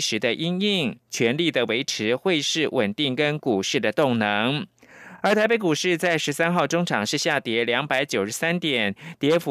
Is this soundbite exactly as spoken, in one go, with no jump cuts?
yes; 0 cuts

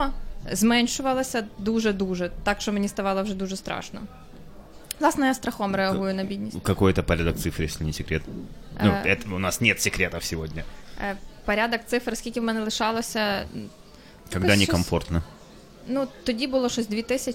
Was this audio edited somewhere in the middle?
no; 0 cuts

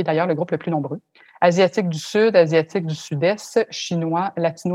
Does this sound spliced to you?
yes; 1 cut; at 1.3 s

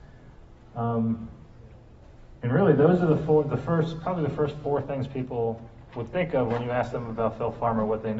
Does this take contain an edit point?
no; 0 cuts

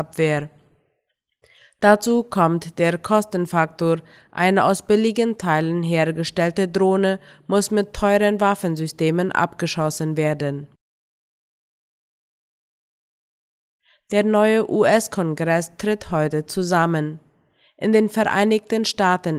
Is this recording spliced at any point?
no; 0 cuts

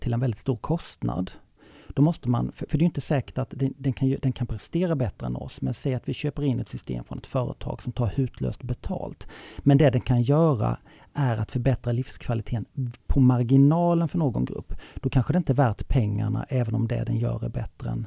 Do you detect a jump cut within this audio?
no; 0 cuts

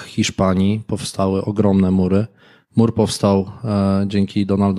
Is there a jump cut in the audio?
no; 0 cuts

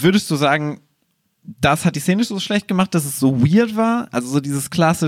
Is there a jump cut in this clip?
no; 0 cuts

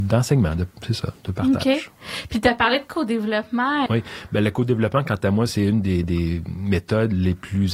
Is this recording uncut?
no; 2 cuts; at 3.9 s, 6.0 s

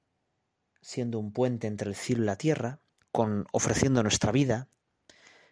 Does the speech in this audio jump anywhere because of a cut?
yes; 1 cut; at 3.0 s

